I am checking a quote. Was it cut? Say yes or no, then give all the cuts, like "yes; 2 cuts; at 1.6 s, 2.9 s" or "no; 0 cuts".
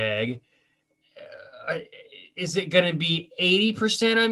no; 0 cuts